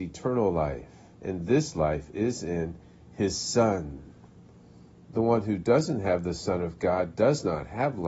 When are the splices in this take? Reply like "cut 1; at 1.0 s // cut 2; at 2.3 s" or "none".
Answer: cut 1; at 1.1 s // cut 2; at 4.9 s